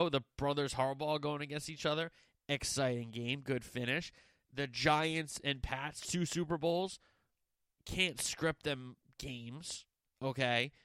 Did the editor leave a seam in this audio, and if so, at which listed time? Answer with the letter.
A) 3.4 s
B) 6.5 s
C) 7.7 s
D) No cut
C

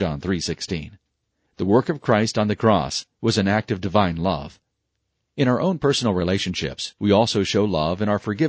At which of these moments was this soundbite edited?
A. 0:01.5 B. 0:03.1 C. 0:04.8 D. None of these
B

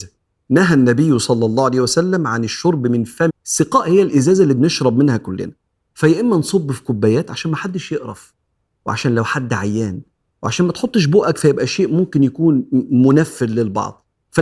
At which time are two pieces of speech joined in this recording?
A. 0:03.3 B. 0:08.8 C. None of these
A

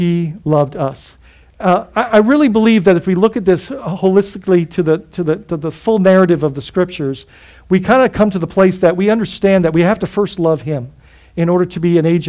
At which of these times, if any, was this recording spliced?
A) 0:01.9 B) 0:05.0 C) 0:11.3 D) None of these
D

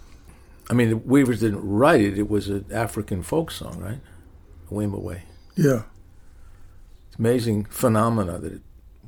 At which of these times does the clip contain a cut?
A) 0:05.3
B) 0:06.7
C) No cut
C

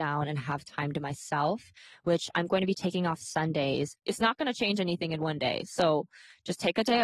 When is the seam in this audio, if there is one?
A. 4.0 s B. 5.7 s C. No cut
A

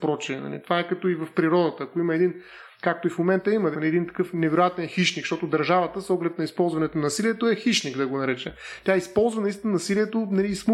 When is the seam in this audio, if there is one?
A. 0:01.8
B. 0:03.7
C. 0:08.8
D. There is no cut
B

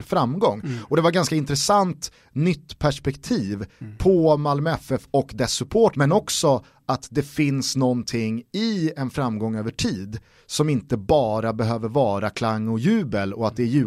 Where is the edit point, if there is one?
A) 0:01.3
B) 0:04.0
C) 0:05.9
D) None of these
C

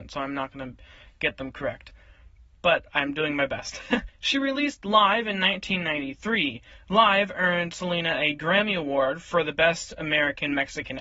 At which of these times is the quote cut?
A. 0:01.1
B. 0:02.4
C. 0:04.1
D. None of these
C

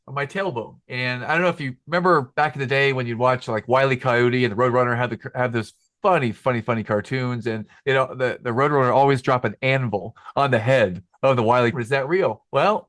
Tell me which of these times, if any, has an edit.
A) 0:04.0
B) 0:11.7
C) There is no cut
B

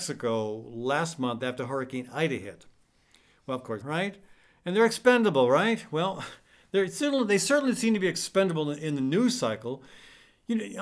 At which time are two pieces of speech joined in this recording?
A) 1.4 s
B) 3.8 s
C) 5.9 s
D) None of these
B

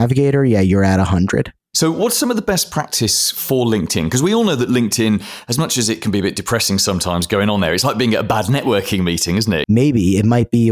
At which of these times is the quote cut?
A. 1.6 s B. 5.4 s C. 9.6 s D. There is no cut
C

